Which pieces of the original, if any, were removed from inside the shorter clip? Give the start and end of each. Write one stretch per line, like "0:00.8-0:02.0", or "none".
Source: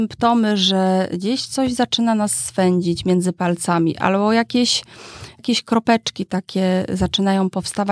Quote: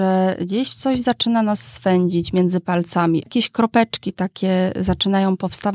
0:03.9-0:05.4